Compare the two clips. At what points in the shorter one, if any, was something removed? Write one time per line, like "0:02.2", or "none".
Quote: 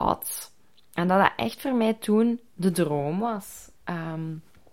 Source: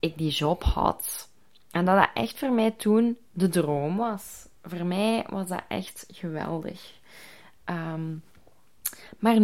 0:03.8